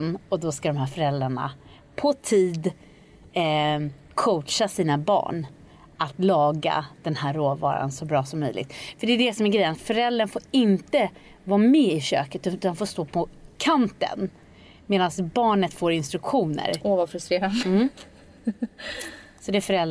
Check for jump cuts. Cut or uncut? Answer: cut